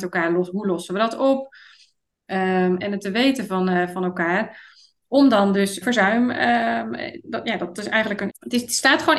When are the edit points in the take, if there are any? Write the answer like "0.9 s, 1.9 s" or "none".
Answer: 2.8 s, 5.8 s, 8.3 s